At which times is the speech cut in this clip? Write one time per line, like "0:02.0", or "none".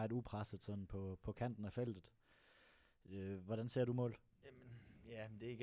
none